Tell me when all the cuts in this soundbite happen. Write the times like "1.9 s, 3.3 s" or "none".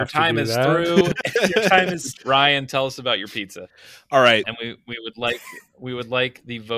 2.2 s, 4.4 s